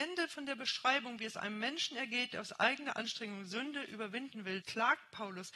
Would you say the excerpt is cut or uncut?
cut